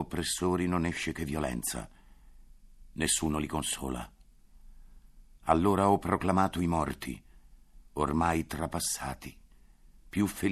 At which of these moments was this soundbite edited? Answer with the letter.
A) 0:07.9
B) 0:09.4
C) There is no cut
C